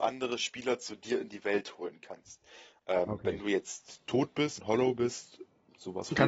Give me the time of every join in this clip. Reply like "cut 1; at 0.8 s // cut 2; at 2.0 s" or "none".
cut 1; at 4.6 s